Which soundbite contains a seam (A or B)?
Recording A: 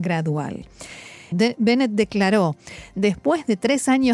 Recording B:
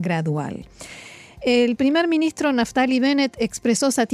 A